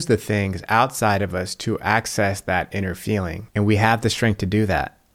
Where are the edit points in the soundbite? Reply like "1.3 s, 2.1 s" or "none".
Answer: 3.5 s